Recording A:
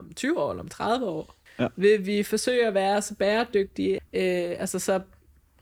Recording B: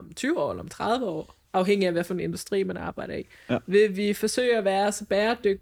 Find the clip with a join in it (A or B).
A